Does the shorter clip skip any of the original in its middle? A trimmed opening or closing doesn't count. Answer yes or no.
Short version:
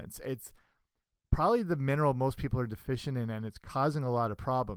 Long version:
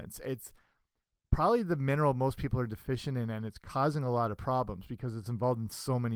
no